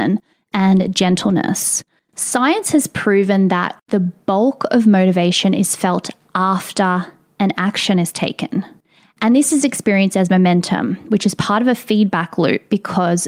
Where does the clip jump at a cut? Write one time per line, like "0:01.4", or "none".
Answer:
0:02.0